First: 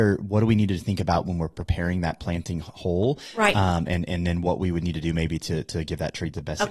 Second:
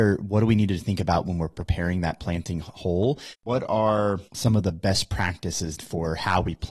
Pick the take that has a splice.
second; 2 cuts; at 3.3 s, 5.8 s

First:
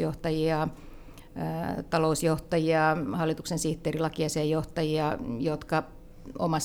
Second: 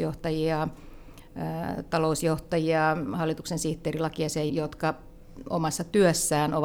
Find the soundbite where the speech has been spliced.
second; 1 cut; at 4.5 s

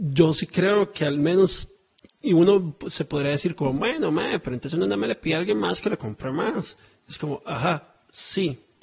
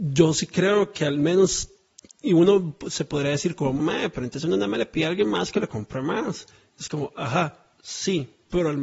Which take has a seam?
second; 1 cut; at 3.8 s

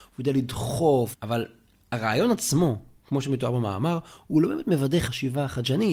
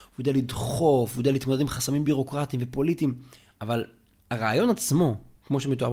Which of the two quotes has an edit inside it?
first; 1 cut; at 1.1 s

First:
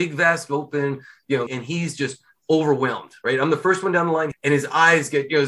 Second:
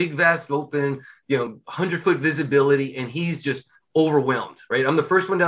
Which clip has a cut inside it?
first; 2 cuts; at 1.5 s, 4.3 s

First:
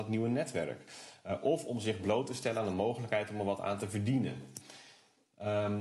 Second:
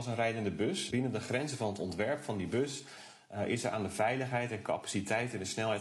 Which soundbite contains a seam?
second; 1 cut; at 0.9 s

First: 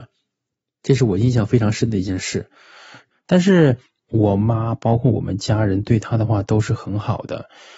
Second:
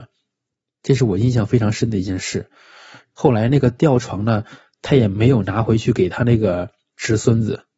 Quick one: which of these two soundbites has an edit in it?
first; 1 cut; at 3.1 s

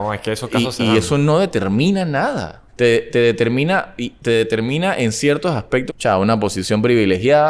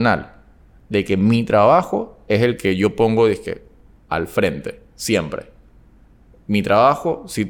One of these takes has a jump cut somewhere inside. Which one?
first; 2 cuts; at 2.7 s, 5.9 s

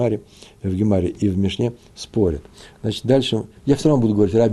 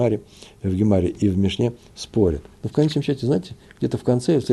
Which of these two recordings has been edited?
second; 1 cut; at 2.5 s

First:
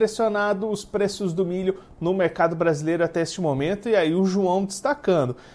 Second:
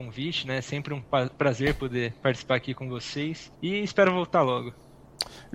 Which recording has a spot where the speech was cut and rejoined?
second; 2 cuts; at 1.3 s, 3.5 s

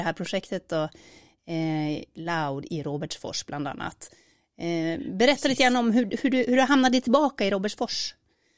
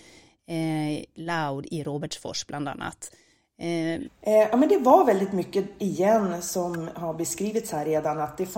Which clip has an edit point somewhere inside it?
second; 2 cuts; at 4.0 s, 5.8 s

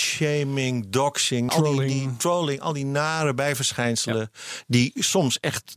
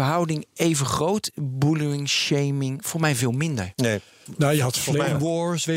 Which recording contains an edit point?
first; 1 cut; at 1.5 s

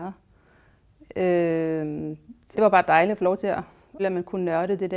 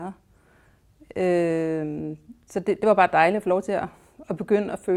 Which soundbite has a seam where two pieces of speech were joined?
first; 2 cuts; at 2.5 s, 4.0 s

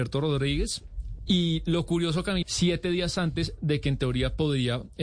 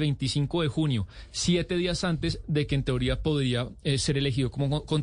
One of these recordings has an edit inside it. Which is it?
first; 2 cuts; at 1.2 s, 2.4 s

